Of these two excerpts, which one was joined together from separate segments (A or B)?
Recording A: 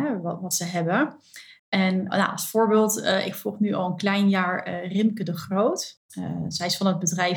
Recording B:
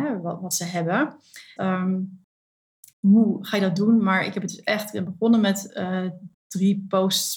B